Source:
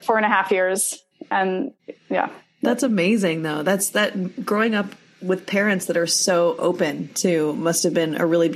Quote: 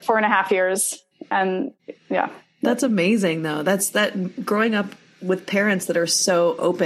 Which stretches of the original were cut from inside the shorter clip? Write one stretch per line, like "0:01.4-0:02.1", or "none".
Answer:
none